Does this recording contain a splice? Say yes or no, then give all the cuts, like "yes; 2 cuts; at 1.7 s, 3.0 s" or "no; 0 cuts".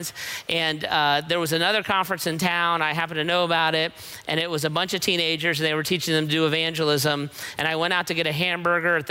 no; 0 cuts